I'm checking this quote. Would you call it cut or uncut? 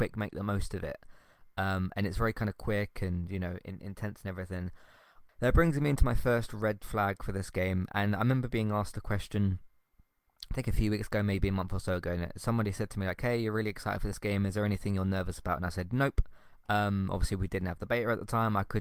cut